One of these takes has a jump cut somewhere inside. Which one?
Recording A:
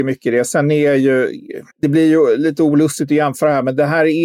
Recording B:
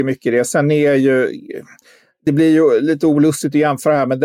A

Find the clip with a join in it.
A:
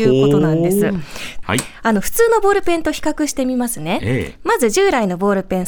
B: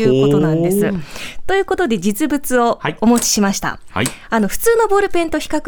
A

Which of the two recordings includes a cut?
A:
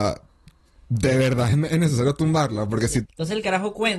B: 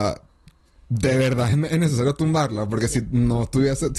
A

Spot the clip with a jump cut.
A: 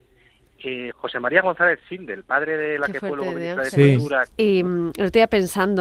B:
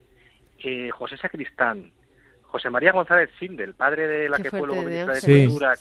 A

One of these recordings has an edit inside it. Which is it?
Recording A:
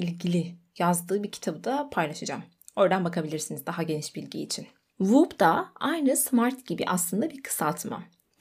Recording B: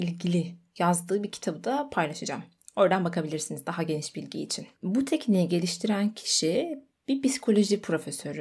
B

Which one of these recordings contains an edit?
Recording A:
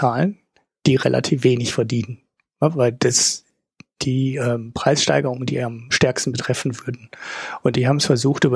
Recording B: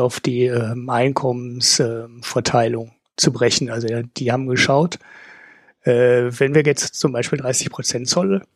A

